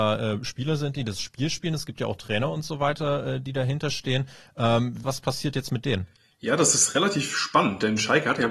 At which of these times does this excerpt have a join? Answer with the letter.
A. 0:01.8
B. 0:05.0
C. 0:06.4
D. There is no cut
B